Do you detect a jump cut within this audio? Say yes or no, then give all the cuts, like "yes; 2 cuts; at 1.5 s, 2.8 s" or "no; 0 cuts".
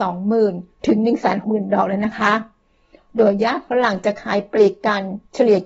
yes; 1 cut; at 1.4 s